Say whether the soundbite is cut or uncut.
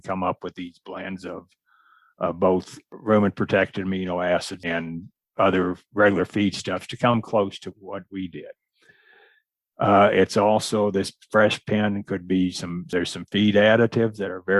uncut